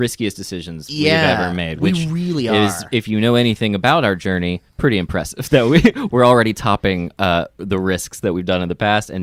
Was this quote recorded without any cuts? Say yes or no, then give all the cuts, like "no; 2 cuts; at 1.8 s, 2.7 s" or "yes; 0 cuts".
yes; 0 cuts